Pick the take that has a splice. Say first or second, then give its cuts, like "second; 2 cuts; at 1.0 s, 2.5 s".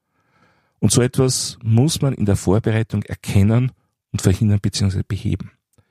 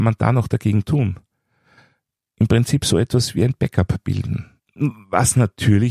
second; 1 cut; at 4.6 s